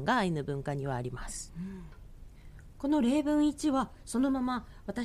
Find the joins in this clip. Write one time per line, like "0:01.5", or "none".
none